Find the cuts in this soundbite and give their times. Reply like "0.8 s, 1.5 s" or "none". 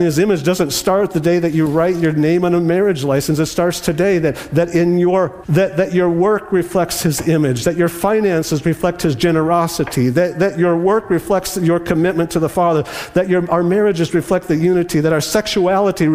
5.4 s